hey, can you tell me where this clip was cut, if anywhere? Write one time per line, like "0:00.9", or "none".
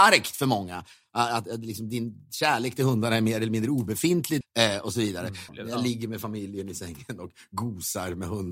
0:04.4
0:05.5